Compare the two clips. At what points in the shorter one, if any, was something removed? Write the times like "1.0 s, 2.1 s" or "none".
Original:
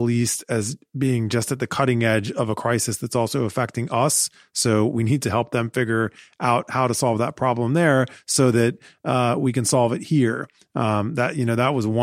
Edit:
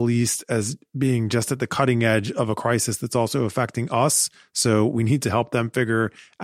none

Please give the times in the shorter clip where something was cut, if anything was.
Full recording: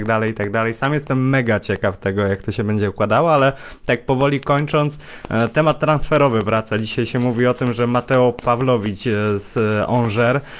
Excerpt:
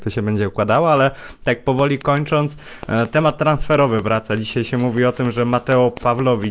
none

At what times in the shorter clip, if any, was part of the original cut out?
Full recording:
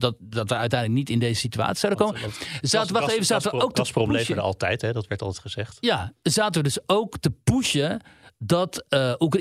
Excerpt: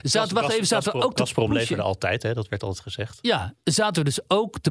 none

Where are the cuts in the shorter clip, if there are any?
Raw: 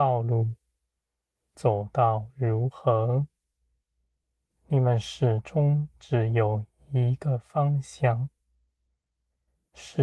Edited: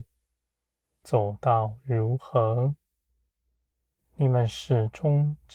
none

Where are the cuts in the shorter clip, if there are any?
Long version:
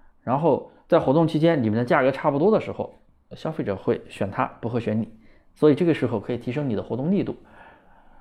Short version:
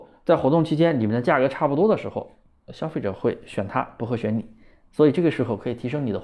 none

